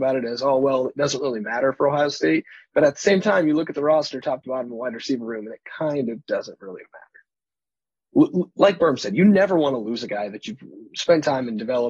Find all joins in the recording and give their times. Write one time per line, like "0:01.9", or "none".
0:08.1